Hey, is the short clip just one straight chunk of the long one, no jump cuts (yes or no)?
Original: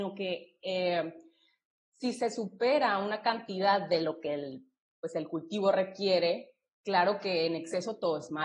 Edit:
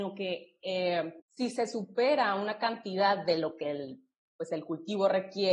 no